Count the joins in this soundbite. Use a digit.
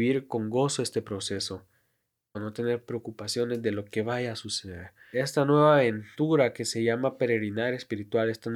2